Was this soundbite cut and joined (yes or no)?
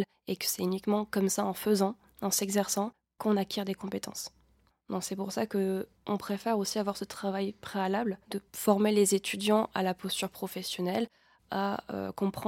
yes